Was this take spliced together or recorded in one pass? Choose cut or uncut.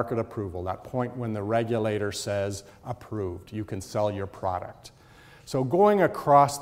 uncut